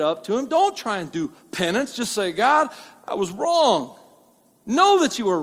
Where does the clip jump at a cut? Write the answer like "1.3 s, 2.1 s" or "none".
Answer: none